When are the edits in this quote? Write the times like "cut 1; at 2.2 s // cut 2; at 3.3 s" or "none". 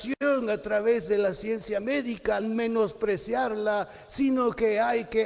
cut 1; at 2.4 s